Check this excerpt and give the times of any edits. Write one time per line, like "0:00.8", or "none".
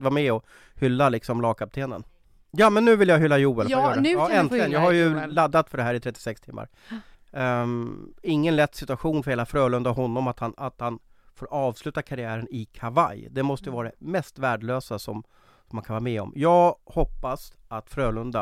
0:07.1